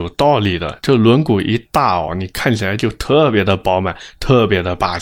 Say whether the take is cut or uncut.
uncut